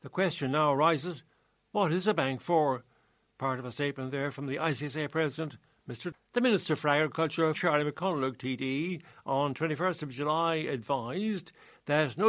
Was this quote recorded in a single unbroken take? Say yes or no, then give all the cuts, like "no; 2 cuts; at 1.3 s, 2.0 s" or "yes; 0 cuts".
no; 2 cuts; at 6.1 s, 7.5 s